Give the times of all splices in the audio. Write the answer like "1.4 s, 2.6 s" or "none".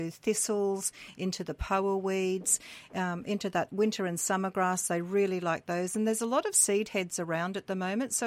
none